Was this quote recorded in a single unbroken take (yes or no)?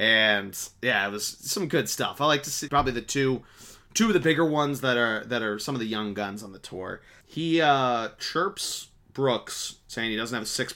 no